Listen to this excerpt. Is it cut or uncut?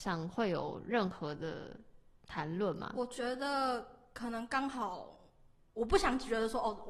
uncut